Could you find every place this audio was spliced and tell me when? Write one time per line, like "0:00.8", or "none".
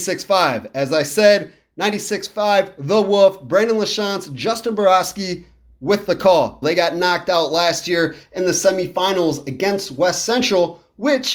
0:06.6